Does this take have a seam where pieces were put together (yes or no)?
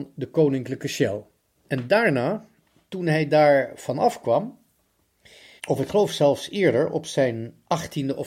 yes